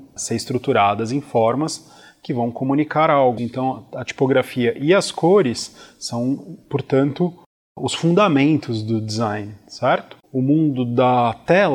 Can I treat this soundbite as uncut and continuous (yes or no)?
no